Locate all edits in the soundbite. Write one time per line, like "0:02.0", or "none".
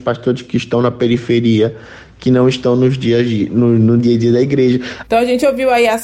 0:05.0